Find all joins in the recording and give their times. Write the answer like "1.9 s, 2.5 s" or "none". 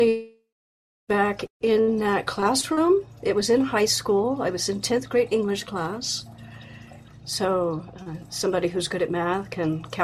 7.1 s